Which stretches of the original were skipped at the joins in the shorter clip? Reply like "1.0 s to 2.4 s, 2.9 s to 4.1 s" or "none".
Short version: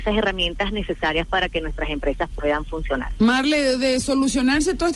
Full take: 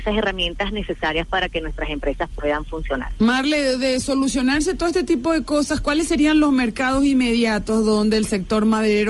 none